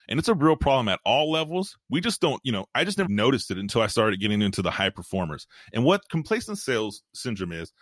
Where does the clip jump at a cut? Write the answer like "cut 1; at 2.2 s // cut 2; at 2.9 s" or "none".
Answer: cut 1; at 3.1 s